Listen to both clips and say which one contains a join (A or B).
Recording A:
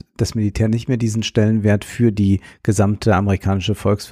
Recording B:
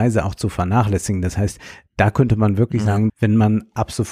B